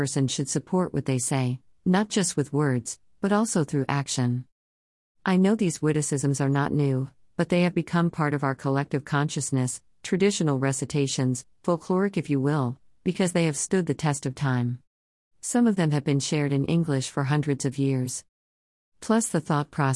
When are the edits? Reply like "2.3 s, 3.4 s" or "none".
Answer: 15.2 s